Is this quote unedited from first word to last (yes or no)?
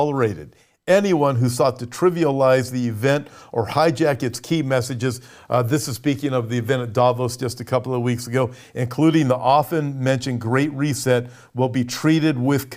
yes